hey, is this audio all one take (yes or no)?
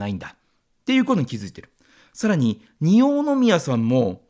yes